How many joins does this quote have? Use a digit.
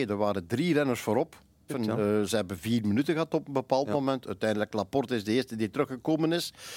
2